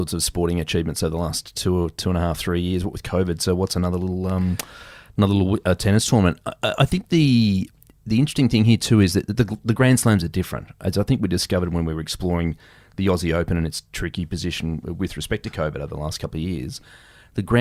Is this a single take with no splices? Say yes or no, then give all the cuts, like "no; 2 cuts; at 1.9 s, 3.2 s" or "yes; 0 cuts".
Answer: yes; 0 cuts